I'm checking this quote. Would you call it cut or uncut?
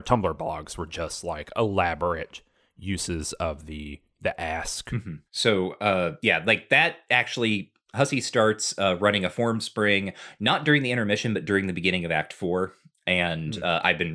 cut